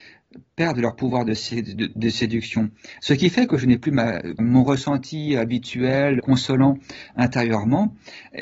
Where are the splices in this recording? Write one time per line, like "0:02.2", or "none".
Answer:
0:04.4
0:06.2